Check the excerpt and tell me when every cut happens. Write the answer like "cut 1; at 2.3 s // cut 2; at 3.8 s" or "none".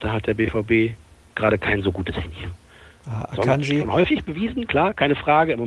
none